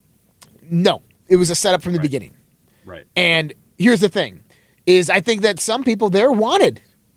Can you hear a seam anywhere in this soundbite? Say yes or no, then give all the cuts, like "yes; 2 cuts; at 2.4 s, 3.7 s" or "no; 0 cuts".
no; 0 cuts